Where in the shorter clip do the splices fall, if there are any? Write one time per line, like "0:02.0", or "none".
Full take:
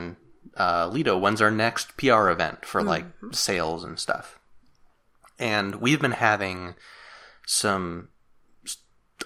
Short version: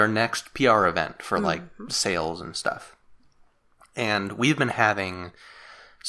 none